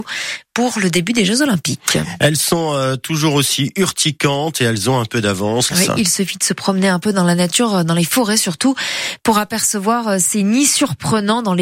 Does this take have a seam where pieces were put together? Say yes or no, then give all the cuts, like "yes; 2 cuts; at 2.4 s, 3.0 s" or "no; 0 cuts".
yes; 1 cut; at 5.7 s